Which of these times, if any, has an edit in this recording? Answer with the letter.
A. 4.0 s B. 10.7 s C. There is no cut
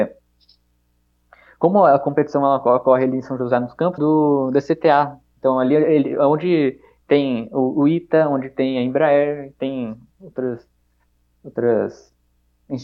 A